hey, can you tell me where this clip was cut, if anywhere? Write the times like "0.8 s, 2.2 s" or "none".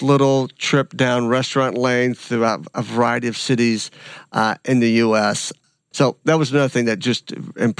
5.9 s